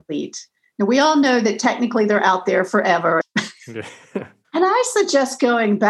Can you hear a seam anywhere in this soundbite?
yes; 2 cuts; at 3.2 s, 4.4 s

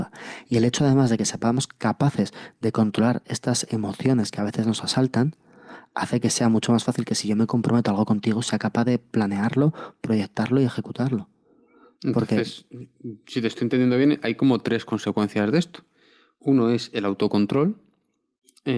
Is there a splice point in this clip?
no; 0 cuts

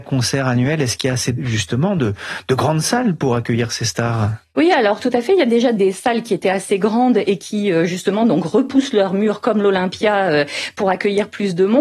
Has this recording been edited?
no; 0 cuts

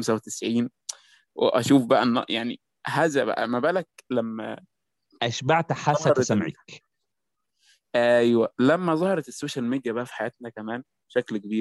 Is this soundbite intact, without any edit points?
yes; 0 cuts

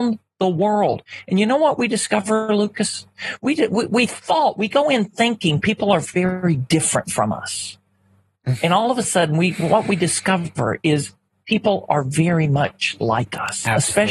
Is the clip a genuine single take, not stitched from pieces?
yes; 0 cuts

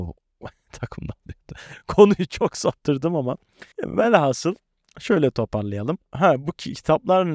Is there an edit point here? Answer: no; 0 cuts

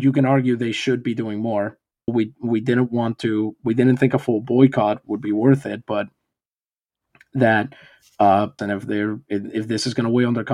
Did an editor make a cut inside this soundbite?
yes; 2 cuts; at 2.1 s, 8.6 s

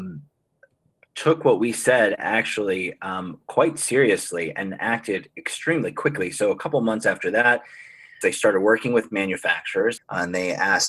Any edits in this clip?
yes; 2 cuts; at 8.2 s, 10.0 s

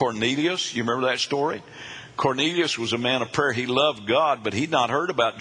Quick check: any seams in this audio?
no; 0 cuts

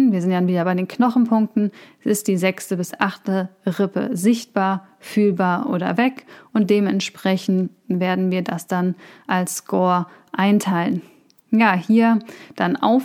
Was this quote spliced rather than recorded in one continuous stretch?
no; 0 cuts

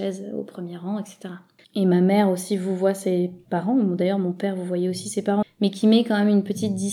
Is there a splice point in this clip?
yes; 2 cuts; at 1.6 s, 5.4 s

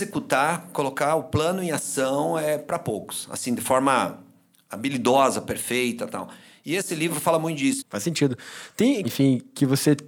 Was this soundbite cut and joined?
yes; 2 cuts; at 7.8 s, 9.0 s

